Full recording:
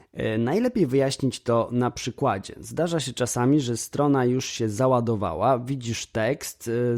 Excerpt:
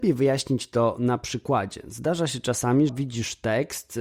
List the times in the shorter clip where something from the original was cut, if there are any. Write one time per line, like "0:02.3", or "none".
0:02.9